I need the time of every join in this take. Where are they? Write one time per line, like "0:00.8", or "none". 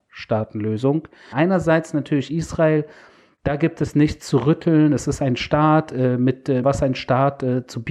0:01.3
0:06.6

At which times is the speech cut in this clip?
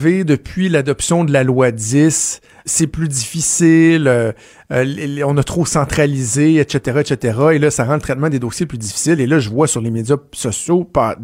0:02.7

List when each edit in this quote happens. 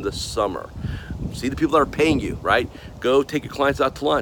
0:01.3

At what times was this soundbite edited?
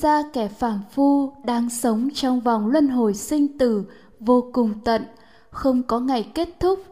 none

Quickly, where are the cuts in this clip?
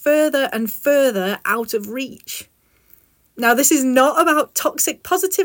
0:03.3

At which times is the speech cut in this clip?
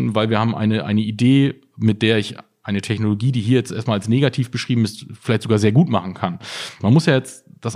0:06.8

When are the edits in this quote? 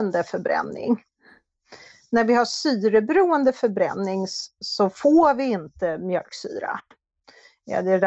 0:04.6

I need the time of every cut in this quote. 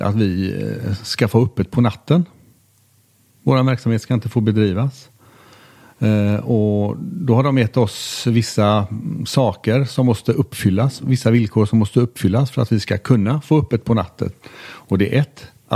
none

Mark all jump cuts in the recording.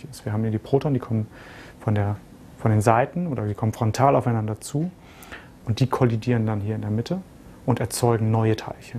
0:05.6

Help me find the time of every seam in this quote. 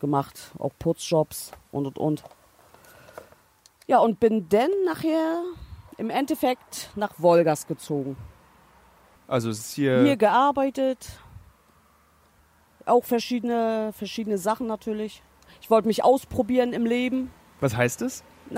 0:09.2

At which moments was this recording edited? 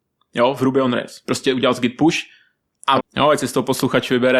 0:03.0

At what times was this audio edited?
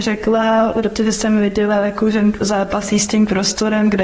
0:02.4

